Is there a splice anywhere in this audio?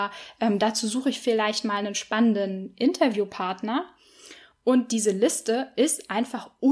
no; 0 cuts

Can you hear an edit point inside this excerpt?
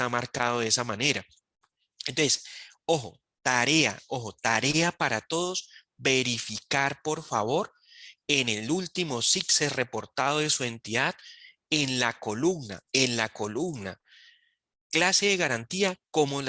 yes; 1 cut; at 12.9 s

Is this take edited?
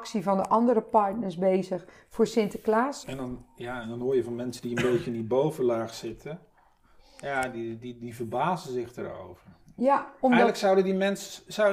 yes; 1 cut; at 3.0 s

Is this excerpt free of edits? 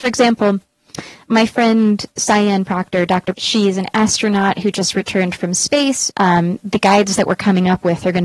no; 2 cuts; at 3.3 s, 6.1 s

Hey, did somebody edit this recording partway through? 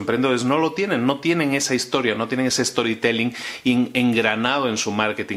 no; 0 cuts

